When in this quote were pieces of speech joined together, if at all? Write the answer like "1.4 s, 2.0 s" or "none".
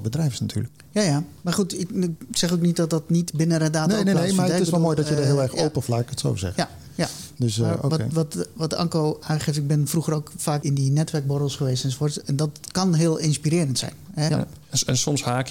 5.9 s, 14.3 s